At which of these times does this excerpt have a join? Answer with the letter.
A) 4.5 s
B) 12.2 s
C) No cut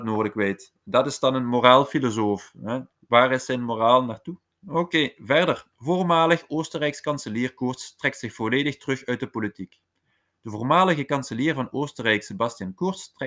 A